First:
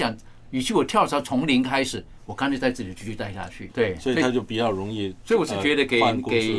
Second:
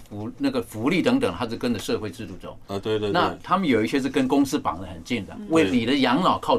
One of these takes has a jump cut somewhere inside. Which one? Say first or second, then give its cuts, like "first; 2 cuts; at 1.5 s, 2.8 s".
first; 1 cut; at 3.7 s